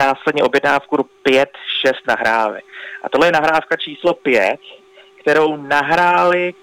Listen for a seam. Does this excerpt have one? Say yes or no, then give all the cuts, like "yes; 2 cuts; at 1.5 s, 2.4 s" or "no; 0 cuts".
no; 0 cuts